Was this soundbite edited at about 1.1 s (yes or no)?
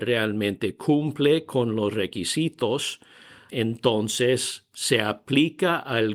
no